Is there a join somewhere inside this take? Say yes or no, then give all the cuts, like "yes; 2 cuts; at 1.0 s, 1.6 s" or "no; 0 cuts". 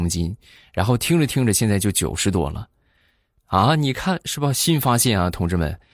no; 0 cuts